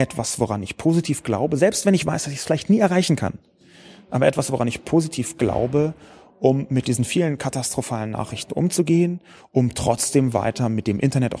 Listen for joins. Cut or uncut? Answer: uncut